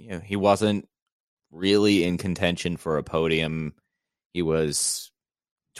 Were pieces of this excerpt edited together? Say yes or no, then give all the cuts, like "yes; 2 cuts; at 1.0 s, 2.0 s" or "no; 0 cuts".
no; 0 cuts